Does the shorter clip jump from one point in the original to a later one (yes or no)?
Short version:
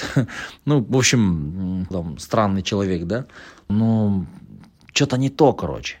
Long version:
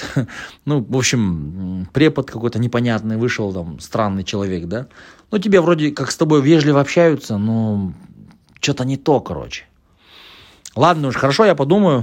yes